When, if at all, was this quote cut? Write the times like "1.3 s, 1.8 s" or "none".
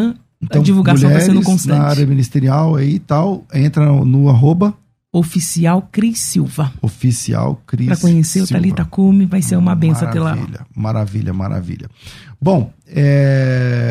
none